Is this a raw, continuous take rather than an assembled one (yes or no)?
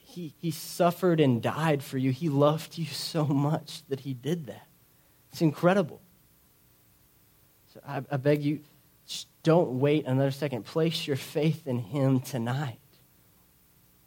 yes